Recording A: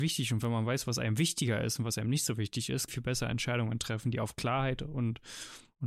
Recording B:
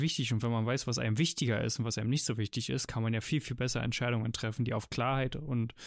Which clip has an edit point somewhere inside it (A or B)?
A